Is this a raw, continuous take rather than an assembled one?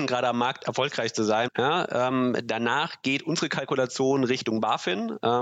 no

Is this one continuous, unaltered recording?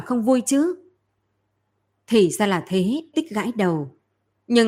no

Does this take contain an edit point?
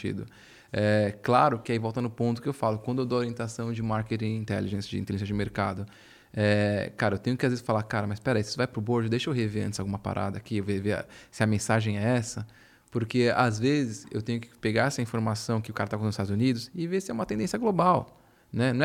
no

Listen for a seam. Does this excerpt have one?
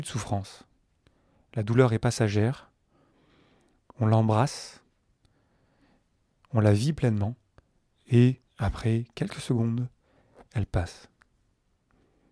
yes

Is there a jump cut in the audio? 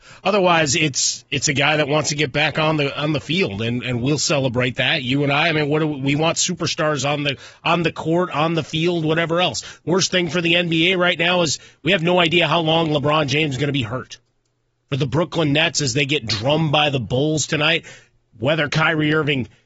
no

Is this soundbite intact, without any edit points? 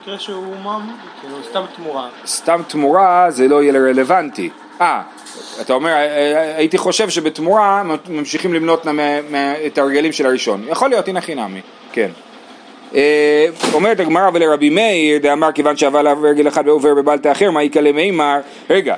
yes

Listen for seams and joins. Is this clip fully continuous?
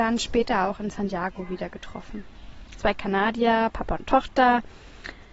no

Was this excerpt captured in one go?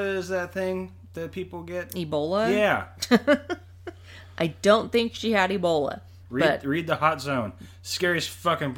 yes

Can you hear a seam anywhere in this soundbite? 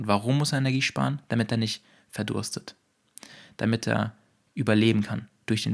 no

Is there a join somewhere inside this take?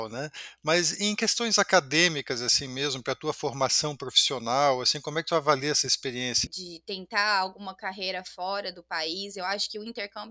yes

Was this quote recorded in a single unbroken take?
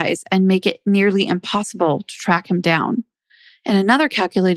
yes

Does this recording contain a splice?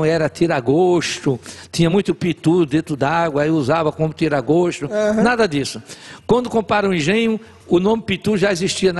no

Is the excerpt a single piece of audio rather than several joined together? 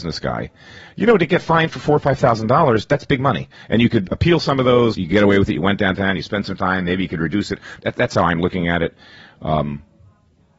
no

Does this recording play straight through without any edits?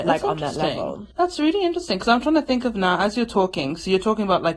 no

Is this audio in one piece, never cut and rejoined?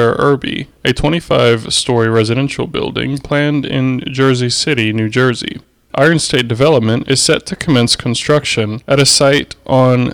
no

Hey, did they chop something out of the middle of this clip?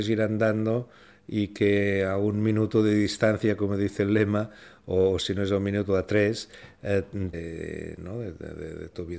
yes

